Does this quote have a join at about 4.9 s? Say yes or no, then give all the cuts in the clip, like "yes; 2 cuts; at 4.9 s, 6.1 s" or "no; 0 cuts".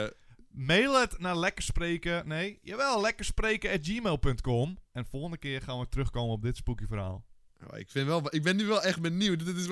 yes; 1 cut; at 4.9 s